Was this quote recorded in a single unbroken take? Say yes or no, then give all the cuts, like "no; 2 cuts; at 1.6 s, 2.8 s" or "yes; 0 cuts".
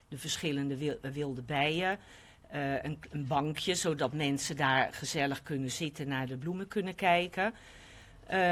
yes; 0 cuts